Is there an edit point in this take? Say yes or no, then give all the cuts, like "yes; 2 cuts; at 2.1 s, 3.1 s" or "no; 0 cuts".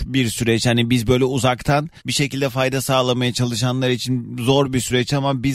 yes; 1 cut; at 2.0 s